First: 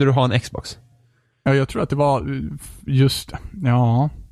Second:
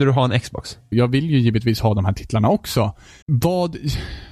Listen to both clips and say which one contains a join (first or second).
second